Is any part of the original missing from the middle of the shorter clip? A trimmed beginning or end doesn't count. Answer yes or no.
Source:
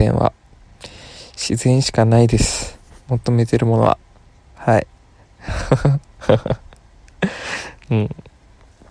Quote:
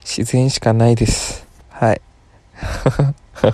yes